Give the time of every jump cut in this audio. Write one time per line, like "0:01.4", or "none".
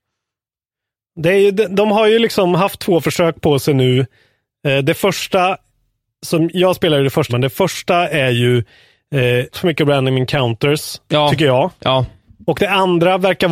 0:07.3
0:09.5

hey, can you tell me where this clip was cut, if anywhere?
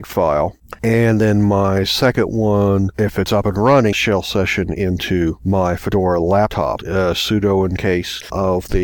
0:03.9
0:06.8

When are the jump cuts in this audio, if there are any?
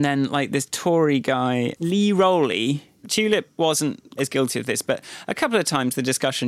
0:03.0
0:04.2

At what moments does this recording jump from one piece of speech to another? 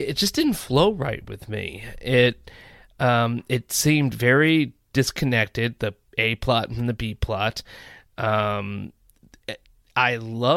none

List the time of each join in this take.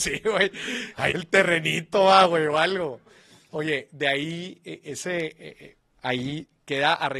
0:01.1
0:03.5

